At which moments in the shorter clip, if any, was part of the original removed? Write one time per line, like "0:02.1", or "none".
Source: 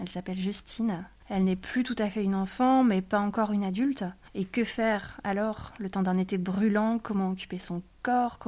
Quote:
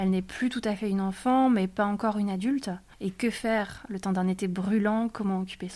0:03.9